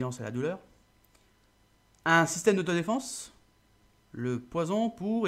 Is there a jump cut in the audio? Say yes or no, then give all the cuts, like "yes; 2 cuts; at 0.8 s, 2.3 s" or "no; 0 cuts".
no; 0 cuts